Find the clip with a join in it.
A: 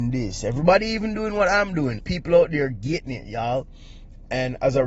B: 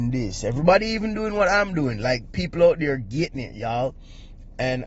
A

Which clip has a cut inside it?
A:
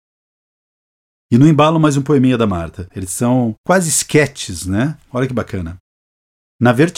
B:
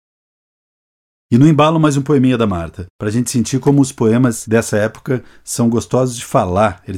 A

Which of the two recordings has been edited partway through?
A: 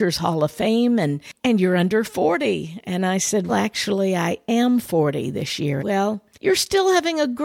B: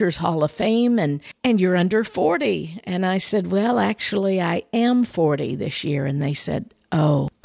A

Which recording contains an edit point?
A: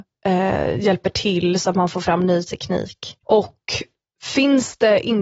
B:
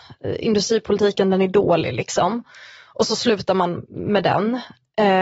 A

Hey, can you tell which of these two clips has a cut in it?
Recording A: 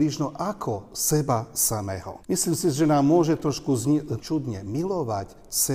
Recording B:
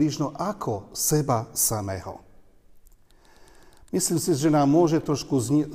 A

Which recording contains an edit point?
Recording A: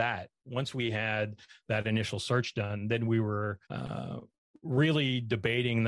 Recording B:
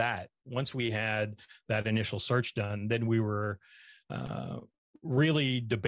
A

